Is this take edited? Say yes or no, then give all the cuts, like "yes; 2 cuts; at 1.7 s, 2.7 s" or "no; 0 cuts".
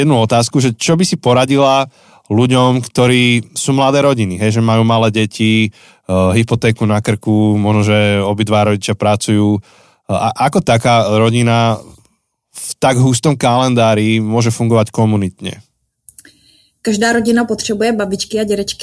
no; 0 cuts